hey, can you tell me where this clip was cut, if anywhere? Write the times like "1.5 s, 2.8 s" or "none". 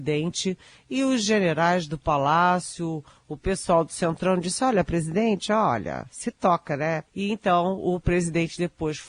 7.1 s